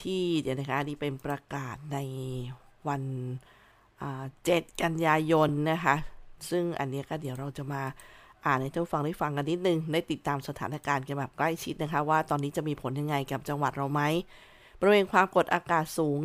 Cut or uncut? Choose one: uncut